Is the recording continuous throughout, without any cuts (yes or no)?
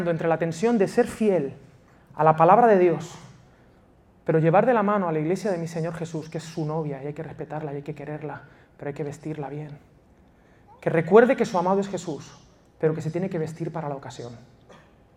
yes